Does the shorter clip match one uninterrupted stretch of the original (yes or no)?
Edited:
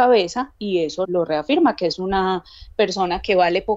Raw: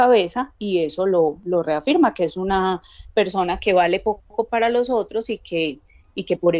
no